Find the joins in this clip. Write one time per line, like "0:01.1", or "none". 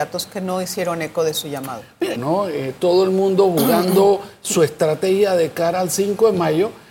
0:02.1